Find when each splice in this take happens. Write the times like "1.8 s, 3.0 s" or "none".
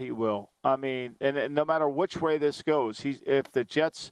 none